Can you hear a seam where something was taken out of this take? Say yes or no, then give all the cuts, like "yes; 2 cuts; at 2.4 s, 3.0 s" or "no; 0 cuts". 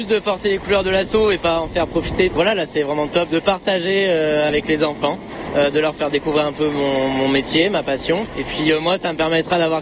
no; 0 cuts